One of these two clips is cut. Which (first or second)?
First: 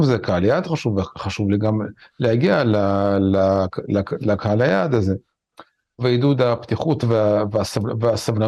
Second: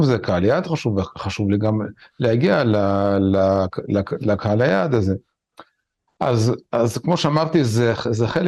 first